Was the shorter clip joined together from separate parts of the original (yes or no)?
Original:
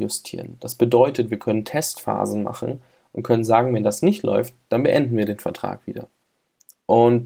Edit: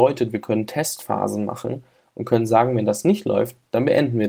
no